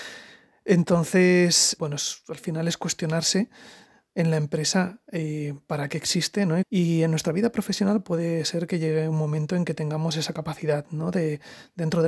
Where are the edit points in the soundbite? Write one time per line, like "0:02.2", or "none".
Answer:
0:01.8
0:06.6